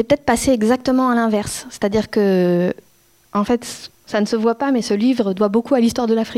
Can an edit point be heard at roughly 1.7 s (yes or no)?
no